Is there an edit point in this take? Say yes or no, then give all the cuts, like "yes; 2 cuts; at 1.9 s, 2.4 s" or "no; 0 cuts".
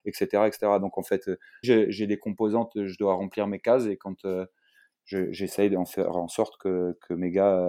yes; 1 cut; at 1.6 s